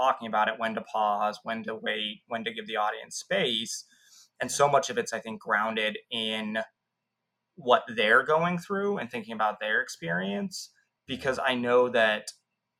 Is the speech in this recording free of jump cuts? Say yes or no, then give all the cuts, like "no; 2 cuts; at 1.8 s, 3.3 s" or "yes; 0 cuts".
yes; 0 cuts